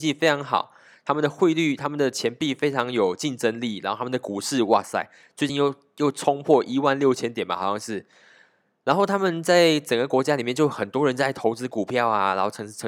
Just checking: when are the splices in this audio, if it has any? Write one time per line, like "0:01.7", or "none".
none